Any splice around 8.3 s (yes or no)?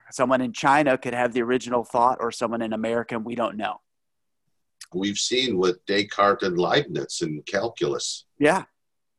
no